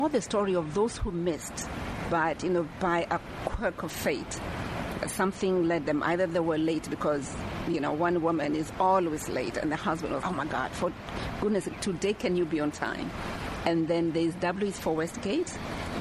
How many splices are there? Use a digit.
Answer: 3